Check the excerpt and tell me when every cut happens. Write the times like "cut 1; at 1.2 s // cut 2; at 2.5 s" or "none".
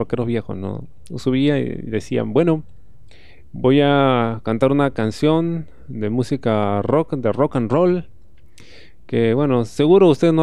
none

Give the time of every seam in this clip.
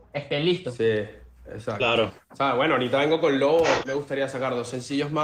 cut 1; at 3.8 s

